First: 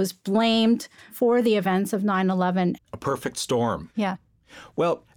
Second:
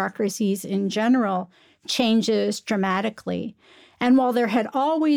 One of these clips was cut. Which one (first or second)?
first